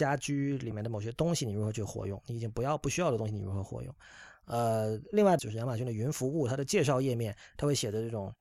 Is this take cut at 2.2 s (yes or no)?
no